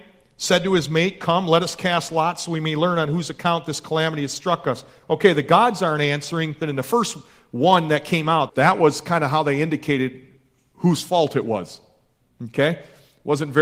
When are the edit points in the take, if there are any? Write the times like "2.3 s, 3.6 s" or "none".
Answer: 6.6 s, 8.5 s